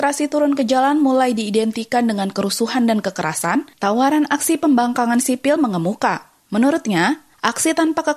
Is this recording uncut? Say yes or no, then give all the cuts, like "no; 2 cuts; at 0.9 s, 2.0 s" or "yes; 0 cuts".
no; 1 cut; at 6.4 s